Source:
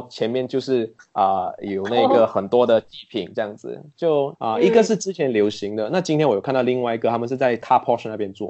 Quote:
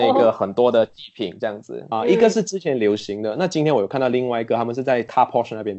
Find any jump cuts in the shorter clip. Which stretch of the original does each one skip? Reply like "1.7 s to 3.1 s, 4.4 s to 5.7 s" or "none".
3.9 s to 4.5 s